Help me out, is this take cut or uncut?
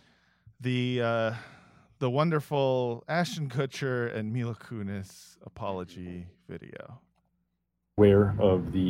uncut